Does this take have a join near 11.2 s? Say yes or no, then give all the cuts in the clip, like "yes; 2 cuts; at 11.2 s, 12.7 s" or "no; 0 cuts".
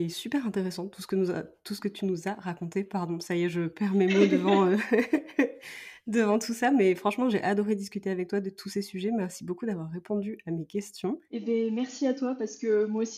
yes; 1 cut; at 11.2 s